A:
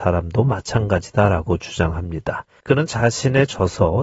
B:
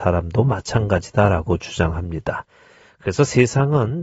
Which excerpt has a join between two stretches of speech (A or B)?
A